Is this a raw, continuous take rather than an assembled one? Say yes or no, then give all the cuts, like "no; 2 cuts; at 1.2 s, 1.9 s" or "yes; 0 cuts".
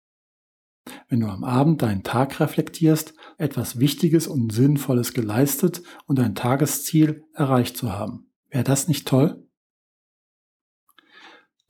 no; 2 cuts; at 3.3 s, 8.4 s